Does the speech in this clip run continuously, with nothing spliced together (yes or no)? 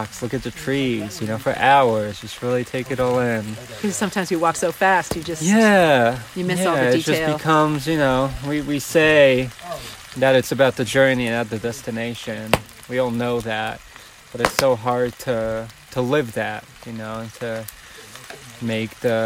yes